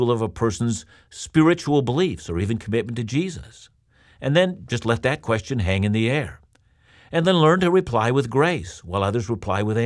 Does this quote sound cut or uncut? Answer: uncut